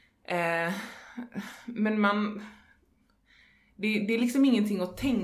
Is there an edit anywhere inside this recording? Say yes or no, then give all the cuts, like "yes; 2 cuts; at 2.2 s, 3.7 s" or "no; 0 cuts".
no; 0 cuts